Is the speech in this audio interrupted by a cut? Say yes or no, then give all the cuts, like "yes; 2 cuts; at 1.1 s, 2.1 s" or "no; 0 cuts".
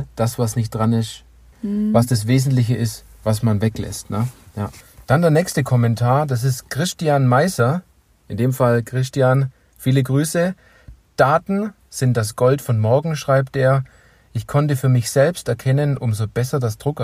yes; 2 cuts; at 1.5 s, 16.0 s